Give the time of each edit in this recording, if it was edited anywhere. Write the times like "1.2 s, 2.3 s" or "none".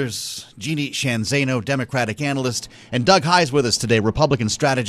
none